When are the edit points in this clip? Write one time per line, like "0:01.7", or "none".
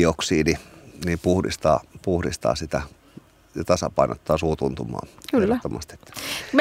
none